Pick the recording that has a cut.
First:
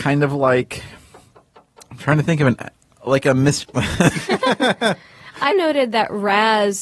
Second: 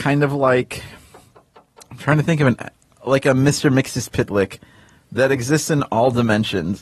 first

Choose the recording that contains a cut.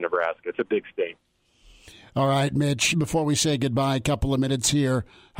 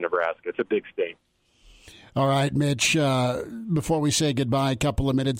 first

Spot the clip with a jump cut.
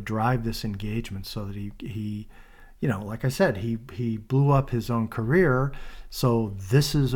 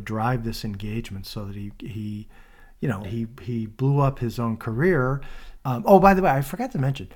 second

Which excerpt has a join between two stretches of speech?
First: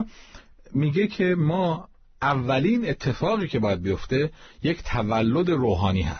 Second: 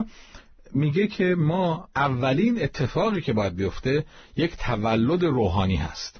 second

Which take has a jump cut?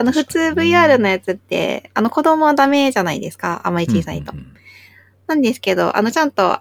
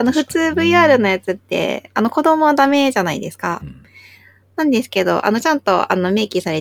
second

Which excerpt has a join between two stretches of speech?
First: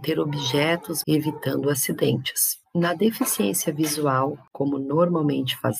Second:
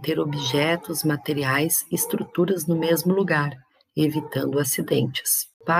first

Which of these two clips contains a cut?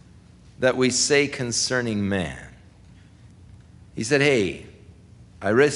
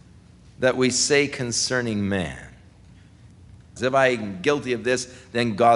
second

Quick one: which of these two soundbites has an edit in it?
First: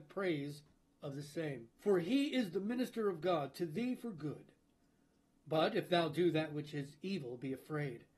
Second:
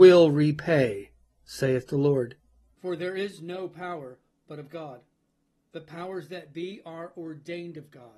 second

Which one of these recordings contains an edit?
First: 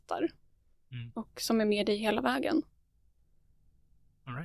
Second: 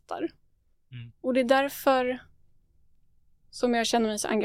second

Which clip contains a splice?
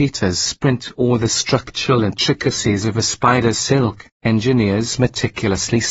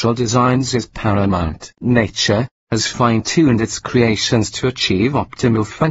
second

